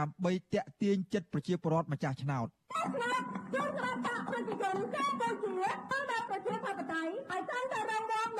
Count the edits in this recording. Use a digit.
1